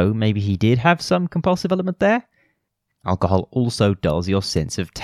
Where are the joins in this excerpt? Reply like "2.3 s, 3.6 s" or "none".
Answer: 2.9 s